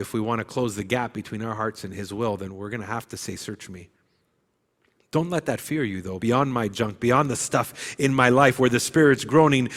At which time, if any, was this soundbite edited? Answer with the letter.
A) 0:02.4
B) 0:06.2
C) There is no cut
B